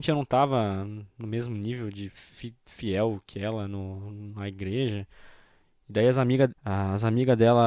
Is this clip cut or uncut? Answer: cut